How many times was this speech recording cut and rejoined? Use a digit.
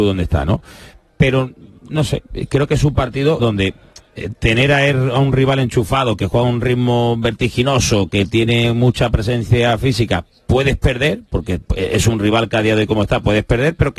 1